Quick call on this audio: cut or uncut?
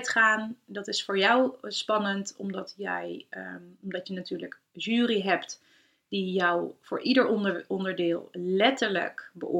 uncut